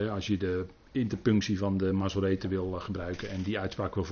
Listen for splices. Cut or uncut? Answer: uncut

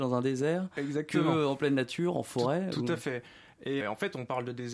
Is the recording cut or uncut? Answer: cut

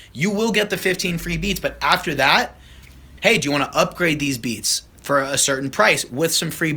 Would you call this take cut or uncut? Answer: cut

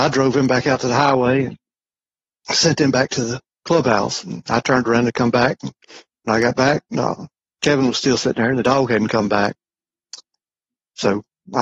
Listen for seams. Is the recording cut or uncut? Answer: uncut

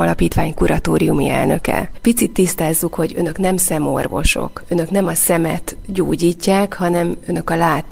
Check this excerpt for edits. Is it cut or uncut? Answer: cut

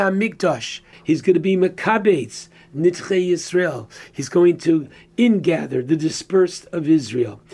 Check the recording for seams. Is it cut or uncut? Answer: cut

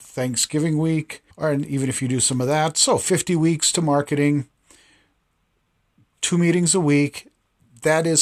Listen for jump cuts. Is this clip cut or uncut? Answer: cut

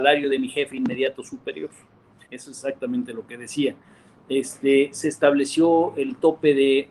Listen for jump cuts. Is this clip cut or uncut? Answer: cut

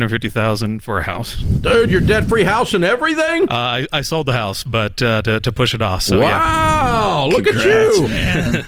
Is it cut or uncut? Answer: uncut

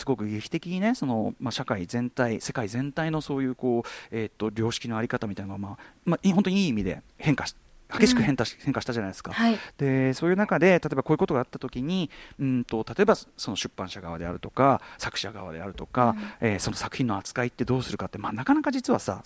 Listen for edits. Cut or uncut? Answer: cut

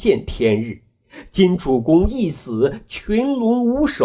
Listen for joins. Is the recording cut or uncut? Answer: uncut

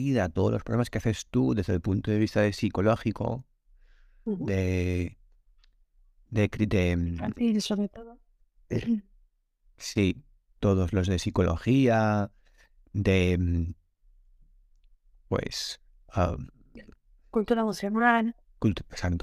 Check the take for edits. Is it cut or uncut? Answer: uncut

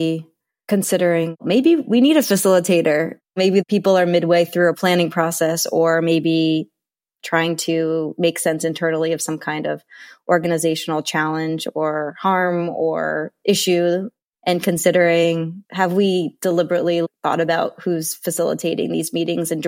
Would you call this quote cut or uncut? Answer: uncut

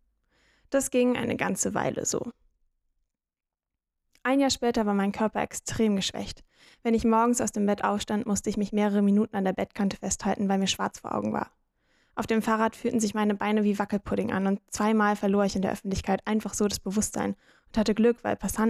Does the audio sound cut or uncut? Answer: uncut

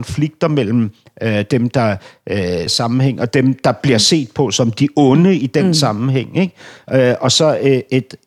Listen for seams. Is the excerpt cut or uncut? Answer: cut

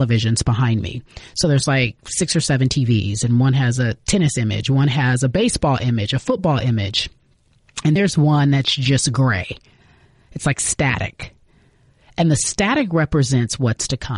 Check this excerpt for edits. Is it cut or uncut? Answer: cut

